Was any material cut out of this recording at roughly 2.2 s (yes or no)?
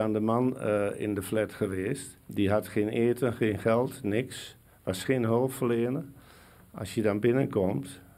yes